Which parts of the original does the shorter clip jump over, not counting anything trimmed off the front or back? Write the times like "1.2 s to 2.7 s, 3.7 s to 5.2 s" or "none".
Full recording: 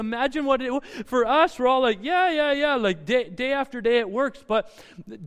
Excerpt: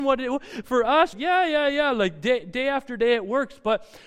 1.5 s to 2.0 s